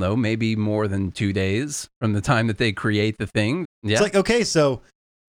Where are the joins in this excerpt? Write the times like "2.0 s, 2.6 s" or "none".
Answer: 3.6 s